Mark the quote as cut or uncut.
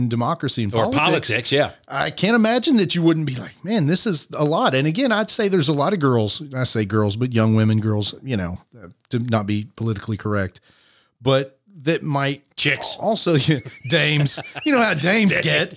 uncut